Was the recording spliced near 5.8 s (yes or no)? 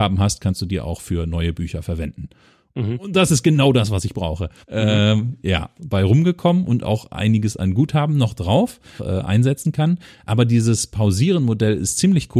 yes